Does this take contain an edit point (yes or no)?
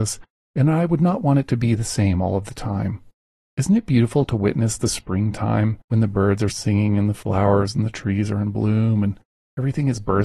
yes